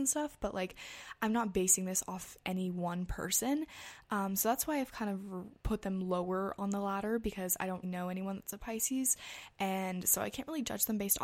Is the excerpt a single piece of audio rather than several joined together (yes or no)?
no